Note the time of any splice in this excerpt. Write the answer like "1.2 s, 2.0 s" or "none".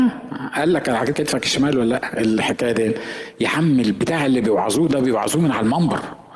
1.1 s